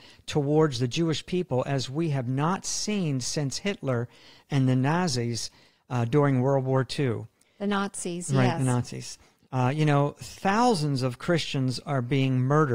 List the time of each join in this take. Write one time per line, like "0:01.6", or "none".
none